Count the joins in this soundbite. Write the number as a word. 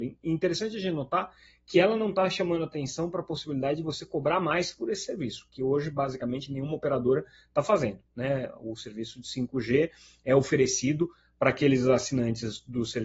zero